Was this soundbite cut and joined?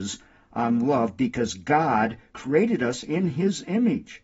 yes; 1 cut; at 2.3 s

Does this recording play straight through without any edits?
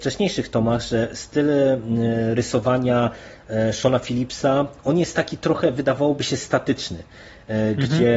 yes; 0 cuts

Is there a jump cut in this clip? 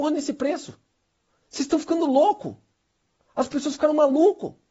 no; 0 cuts

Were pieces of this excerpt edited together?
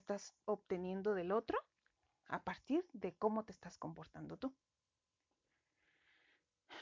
no; 0 cuts

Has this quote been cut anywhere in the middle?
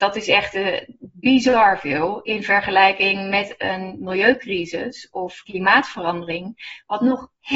no; 0 cuts

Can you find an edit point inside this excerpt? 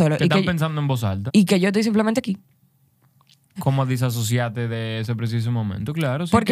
yes; 2 cuts; at 1.3 s, 3.6 s

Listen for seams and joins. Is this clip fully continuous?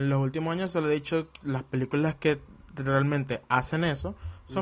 yes; 0 cuts

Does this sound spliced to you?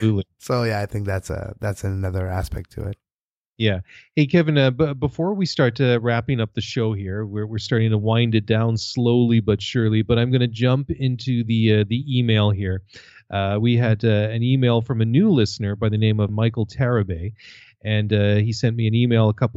yes; 1 cut; at 16.3 s

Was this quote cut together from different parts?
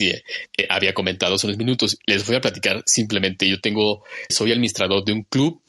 yes; 1 cut; at 4.3 s

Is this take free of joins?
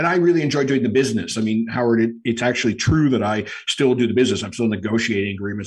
yes; 0 cuts

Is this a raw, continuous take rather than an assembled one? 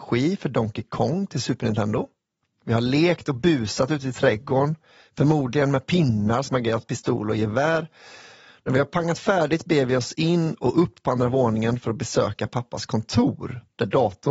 no; 1 cut; at 2.5 s

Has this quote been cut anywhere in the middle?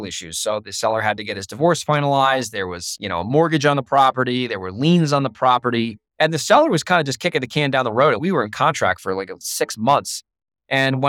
yes; 1 cut; at 6.1 s

